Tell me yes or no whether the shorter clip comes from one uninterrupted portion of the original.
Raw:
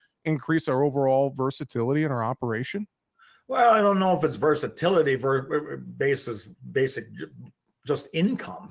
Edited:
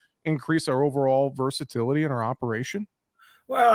yes